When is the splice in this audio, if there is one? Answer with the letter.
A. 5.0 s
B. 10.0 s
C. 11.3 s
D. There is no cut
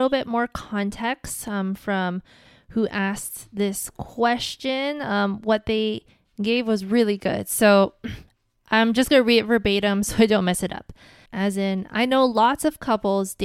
C